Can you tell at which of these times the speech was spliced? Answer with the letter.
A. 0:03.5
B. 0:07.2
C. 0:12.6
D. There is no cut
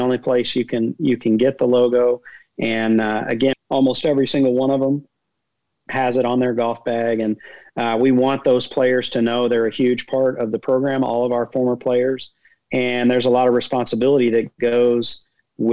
A